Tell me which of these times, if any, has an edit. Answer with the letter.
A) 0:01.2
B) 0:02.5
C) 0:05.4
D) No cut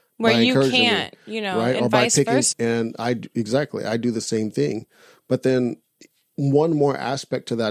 B